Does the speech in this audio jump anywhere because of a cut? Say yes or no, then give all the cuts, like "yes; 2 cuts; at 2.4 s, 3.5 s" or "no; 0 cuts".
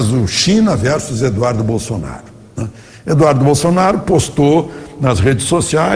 no; 0 cuts